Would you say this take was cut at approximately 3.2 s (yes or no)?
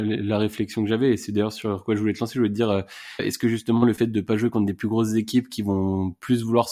yes